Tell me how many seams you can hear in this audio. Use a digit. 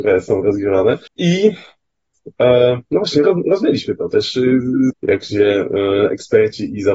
2